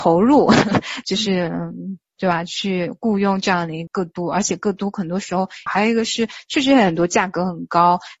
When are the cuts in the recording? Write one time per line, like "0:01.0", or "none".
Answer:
0:03.9
0:05.7